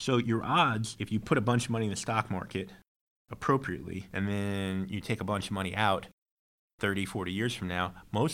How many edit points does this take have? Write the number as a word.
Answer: zero